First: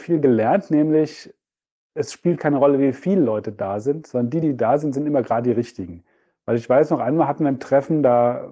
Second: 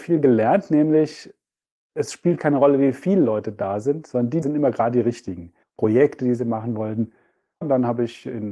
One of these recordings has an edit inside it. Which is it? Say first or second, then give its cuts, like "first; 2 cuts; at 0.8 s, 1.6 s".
second; 3 cuts; at 4.4 s, 5.6 s, 7.6 s